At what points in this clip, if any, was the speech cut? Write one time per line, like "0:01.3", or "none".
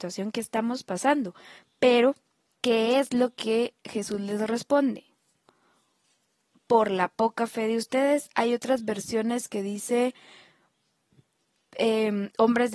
0:02.5